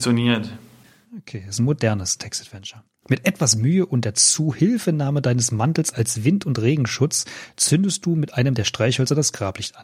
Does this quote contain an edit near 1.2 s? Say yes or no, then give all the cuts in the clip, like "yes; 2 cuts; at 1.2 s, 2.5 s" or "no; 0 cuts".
no; 1 cut; at 5.9 s